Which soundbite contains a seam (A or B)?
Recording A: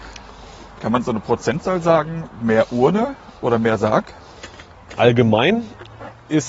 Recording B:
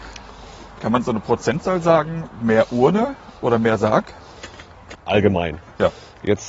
B